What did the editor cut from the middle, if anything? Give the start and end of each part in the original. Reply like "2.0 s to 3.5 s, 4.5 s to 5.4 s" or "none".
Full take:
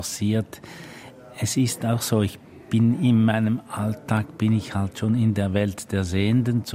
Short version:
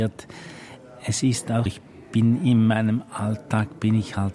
2.0 s to 2.2 s